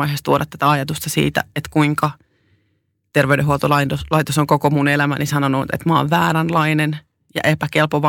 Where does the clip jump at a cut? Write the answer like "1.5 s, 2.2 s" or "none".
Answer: none